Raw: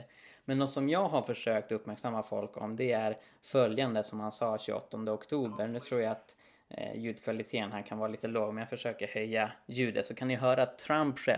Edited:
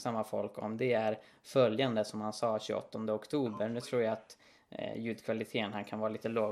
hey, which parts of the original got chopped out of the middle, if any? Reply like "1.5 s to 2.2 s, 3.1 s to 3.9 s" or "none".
none